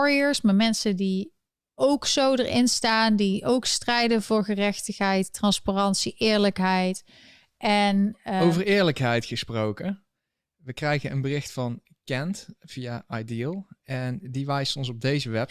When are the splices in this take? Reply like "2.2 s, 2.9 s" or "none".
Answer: none